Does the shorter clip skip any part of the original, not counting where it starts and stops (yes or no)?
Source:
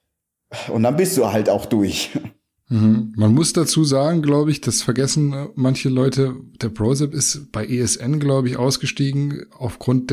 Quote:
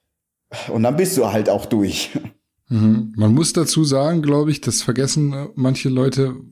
no